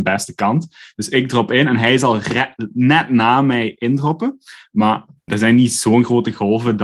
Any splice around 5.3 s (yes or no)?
yes